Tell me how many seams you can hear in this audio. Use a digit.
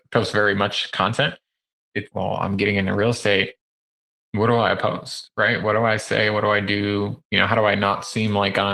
1